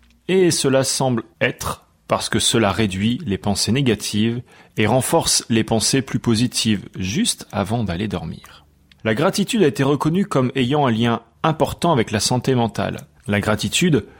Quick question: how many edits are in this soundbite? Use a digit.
1